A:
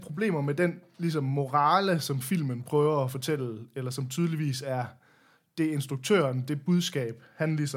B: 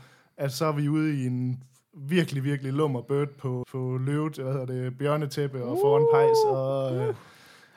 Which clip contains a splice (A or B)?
B